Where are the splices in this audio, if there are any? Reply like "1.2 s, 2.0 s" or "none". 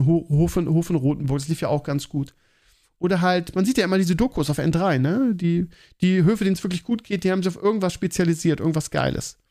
none